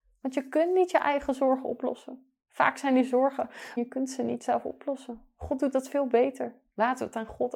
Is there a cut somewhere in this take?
yes; 1 cut; at 3.8 s

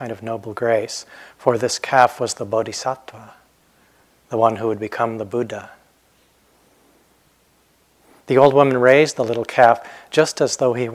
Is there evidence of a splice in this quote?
no; 0 cuts

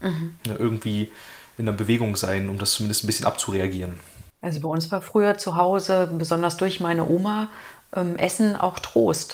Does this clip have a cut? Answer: yes; 1 cut; at 4.3 s

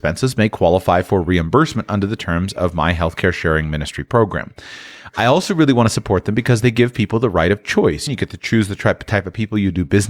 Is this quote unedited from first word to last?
no; 1 cut; at 8.1 s

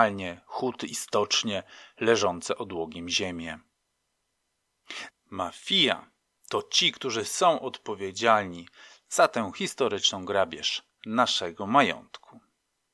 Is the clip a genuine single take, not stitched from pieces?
no; 1 cut; at 5.1 s

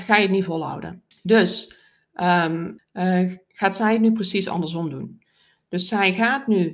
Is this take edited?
yes; 2 cuts; at 1.1 s, 2.8 s

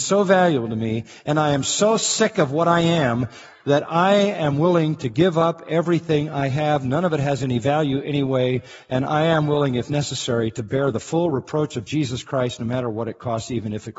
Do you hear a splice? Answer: no; 0 cuts

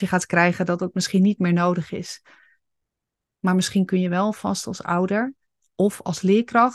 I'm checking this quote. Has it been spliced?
no; 0 cuts

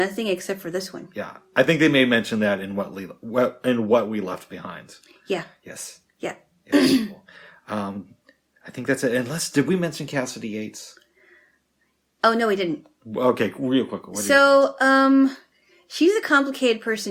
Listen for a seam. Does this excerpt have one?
no; 0 cuts

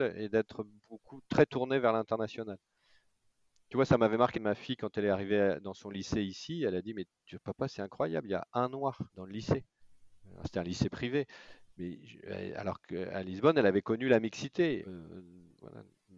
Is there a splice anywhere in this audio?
yes; 3 cuts; at 4.3 s, 9.1 s, 14.8 s

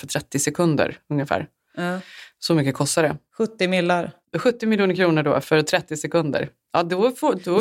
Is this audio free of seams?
yes; 0 cuts

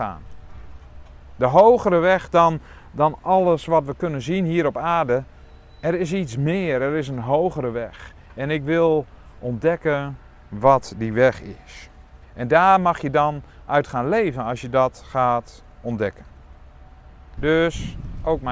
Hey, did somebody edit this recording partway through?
yes; 2 cuts; at 12.2 s, 17.4 s

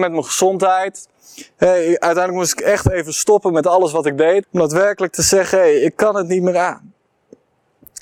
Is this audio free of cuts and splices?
no; 1 cut; at 4.4 s

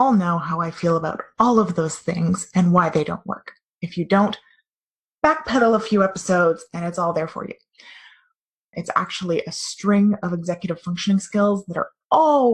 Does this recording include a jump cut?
yes; 1 cut; at 8.7 s

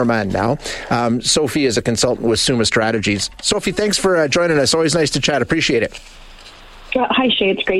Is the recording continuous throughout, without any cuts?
yes; 0 cuts

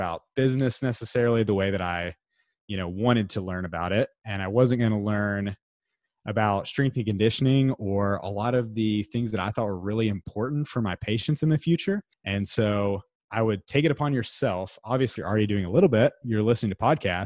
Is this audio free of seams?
no; 1 cut; at 15.2 s

